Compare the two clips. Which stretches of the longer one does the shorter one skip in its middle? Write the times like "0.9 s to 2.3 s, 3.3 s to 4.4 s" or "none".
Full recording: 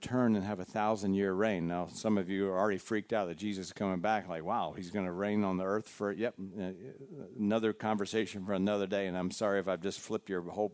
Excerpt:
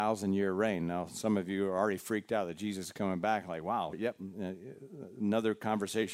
4.7 s to 6.1 s